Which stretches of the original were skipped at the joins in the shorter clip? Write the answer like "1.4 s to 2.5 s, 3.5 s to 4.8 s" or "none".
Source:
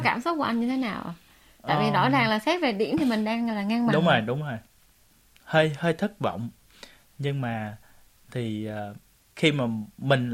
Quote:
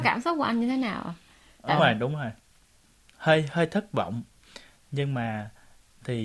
1.8 s to 4.1 s